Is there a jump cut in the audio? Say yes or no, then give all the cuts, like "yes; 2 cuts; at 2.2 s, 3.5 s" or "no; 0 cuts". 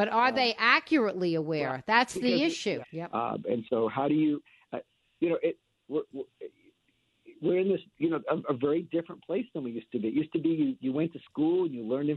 yes; 1 cut; at 2.8 s